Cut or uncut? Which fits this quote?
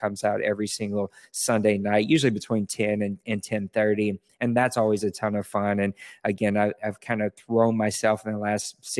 uncut